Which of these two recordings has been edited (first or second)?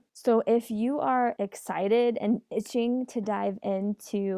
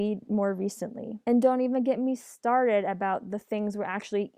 second